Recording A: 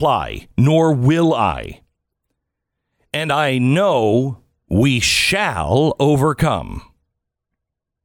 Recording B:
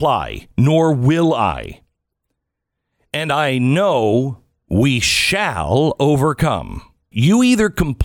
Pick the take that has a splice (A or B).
B